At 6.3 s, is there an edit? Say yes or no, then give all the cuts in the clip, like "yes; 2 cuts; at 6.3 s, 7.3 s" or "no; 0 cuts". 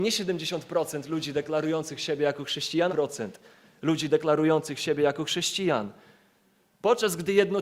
no; 1 cut; at 2.9 s